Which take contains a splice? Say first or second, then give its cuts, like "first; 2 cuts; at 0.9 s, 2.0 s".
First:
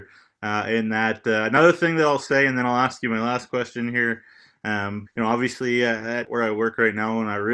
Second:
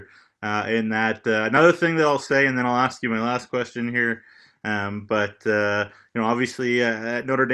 first; 2 cuts; at 5.1 s, 6.2 s